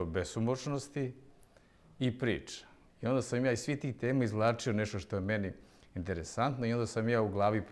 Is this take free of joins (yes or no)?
no